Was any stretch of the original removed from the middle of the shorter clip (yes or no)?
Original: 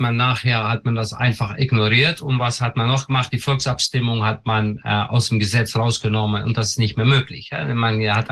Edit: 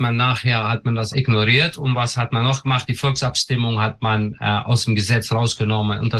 yes